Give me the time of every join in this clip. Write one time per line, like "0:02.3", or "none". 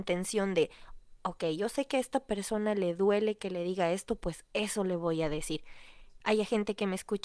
0:06.2